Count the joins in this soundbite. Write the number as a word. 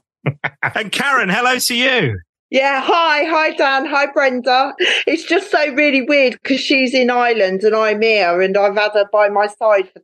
zero